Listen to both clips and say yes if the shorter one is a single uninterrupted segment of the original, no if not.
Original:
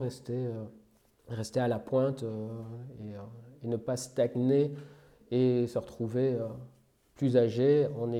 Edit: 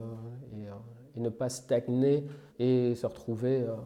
no